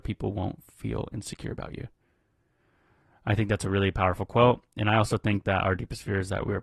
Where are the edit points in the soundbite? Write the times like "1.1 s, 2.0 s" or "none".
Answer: none